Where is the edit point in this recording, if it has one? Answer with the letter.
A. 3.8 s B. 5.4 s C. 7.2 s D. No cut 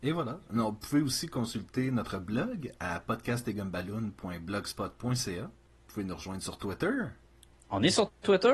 D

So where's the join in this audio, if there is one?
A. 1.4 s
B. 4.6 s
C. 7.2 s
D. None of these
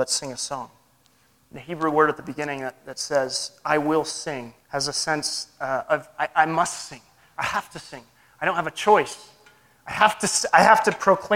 B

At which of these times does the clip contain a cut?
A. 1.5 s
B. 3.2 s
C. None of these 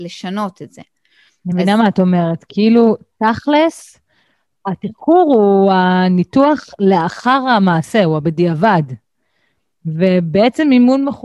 C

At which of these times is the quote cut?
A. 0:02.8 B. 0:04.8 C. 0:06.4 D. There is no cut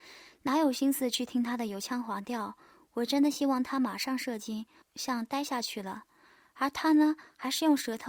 B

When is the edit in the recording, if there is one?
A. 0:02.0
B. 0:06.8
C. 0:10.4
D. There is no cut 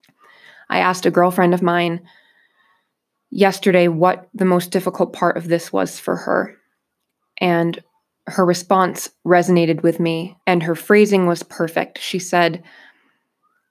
C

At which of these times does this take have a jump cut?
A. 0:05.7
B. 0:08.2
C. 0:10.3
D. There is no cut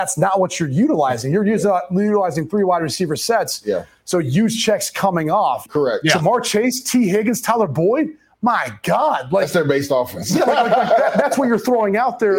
A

